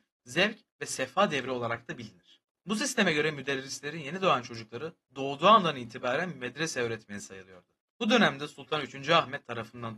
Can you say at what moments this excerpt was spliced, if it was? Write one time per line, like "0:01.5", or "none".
0:02.5
0:07.9